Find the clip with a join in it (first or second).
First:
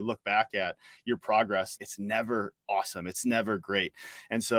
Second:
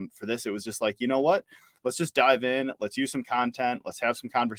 first